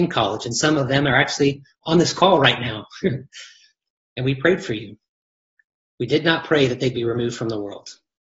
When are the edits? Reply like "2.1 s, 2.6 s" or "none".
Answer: 6.0 s